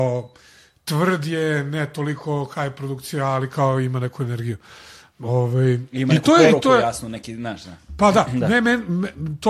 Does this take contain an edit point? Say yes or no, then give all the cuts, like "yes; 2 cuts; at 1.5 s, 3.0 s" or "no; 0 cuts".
no; 0 cuts